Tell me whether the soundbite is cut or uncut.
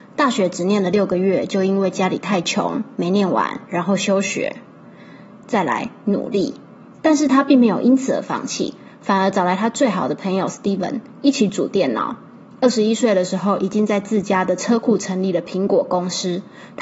uncut